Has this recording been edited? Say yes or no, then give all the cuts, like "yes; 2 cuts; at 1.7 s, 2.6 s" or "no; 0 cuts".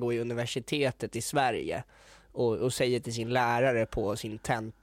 no; 0 cuts